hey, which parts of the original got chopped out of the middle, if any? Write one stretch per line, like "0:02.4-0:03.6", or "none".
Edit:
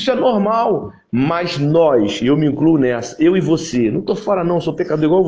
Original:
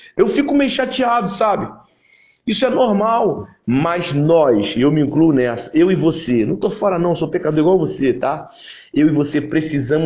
none